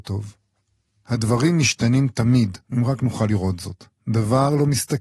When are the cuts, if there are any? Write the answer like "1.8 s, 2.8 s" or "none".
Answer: 2.7 s